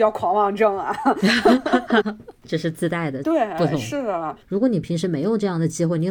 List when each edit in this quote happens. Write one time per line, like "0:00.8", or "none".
0:02.0
0:03.2
0:04.4